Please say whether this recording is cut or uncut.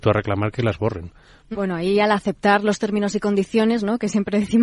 cut